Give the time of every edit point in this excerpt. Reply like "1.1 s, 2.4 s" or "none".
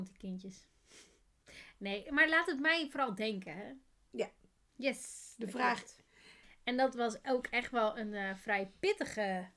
4.7 s, 6.4 s